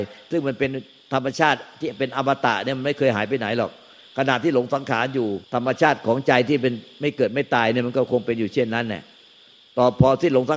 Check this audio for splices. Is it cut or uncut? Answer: cut